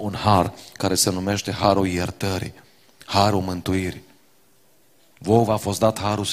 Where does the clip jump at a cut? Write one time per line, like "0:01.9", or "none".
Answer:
none